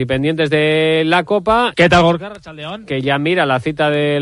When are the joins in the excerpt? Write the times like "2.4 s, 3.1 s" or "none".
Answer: 1.7 s